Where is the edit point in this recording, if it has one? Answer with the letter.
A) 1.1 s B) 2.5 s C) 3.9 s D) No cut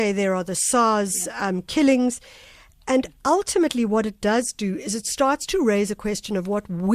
D